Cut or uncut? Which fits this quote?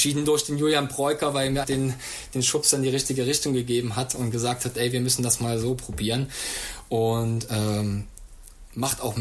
cut